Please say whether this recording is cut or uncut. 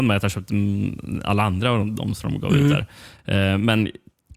uncut